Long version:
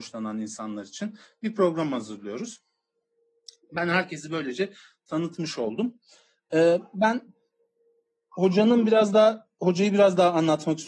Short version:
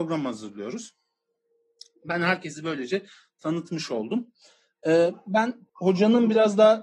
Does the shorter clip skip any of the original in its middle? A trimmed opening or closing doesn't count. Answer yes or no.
yes